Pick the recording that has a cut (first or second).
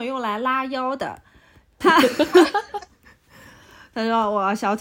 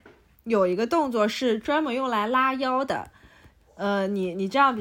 first